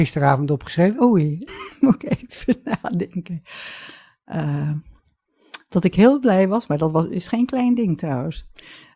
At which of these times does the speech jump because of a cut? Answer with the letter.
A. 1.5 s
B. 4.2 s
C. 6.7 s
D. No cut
A